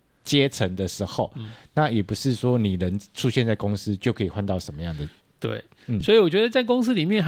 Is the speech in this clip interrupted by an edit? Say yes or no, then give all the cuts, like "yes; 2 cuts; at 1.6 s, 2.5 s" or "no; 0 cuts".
no; 0 cuts